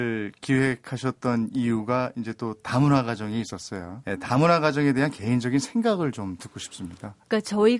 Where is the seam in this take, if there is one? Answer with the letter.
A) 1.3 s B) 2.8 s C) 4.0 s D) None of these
C